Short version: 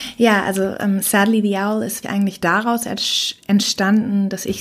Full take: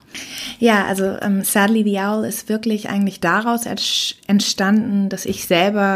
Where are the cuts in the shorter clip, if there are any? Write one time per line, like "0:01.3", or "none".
0:02.0